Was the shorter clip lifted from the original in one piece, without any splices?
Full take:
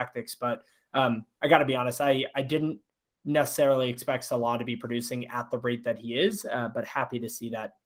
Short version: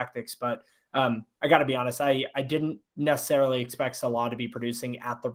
no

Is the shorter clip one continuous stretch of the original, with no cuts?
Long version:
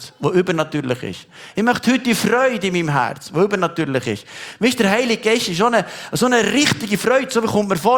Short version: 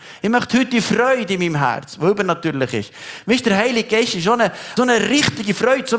no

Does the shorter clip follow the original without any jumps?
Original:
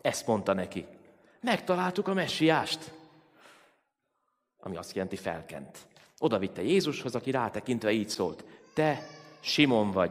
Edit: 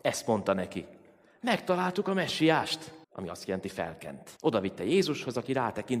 no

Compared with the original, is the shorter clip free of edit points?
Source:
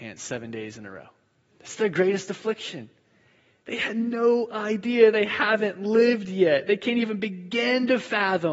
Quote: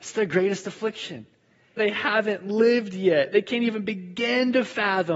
no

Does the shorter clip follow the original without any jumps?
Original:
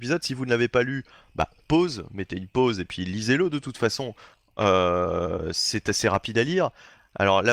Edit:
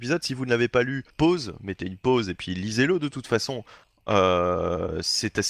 no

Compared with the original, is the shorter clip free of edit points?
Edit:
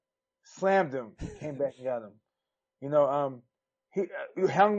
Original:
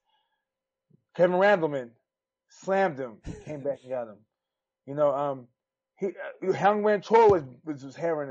yes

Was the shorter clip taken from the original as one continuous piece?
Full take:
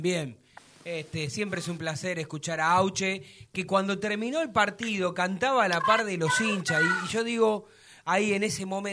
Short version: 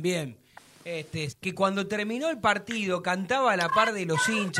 no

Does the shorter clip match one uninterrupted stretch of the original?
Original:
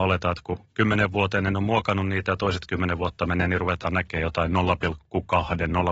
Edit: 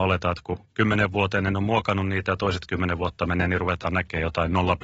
yes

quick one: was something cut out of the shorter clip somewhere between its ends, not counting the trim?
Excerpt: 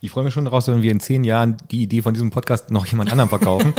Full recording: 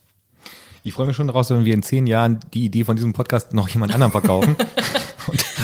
no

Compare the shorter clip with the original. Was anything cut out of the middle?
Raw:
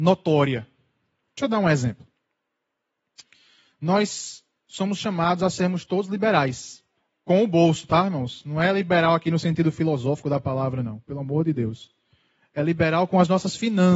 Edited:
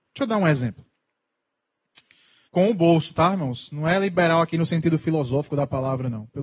yes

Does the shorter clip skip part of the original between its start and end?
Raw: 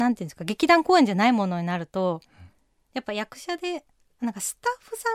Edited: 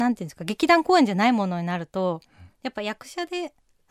yes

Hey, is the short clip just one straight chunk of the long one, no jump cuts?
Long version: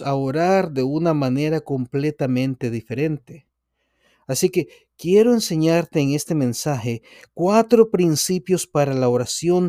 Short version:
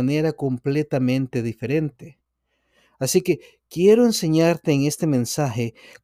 yes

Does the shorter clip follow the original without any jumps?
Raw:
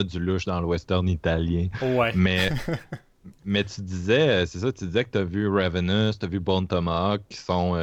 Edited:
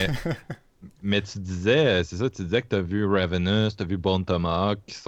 yes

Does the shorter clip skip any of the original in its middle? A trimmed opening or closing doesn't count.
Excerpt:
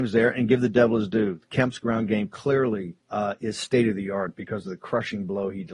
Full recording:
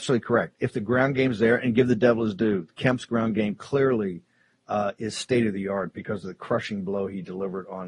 yes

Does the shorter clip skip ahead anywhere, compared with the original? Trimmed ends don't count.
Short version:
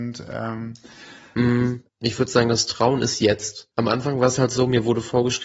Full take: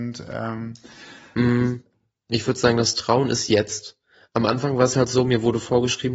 yes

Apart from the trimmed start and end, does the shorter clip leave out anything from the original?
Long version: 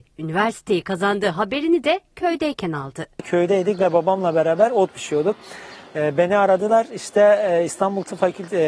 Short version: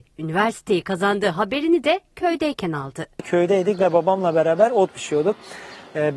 no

